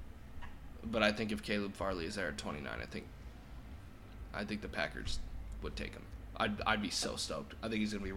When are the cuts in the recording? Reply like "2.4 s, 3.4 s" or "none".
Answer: none

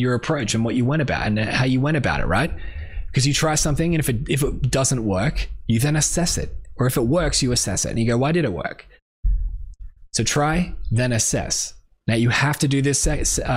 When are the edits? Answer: none

